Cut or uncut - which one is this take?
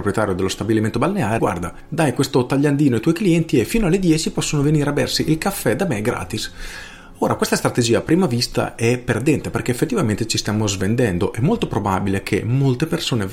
cut